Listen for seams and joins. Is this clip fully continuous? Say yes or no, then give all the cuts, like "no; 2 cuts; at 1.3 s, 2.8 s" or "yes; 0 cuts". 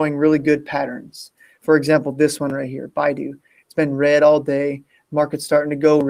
yes; 0 cuts